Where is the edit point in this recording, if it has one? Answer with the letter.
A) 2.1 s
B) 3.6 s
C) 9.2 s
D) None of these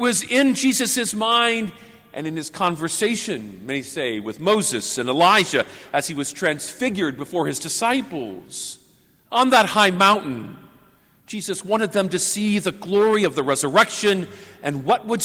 C